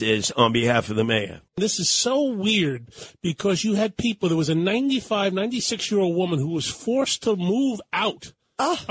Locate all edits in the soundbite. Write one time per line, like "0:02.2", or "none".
0:01.5